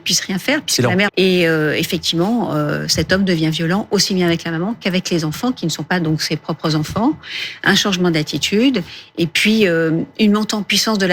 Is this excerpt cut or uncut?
cut